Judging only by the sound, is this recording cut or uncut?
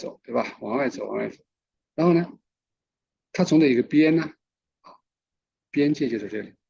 cut